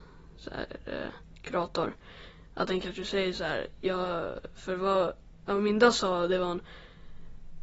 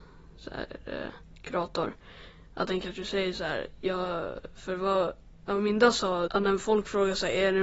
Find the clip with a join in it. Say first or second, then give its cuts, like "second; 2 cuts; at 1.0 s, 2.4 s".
second; 1 cut; at 6.3 s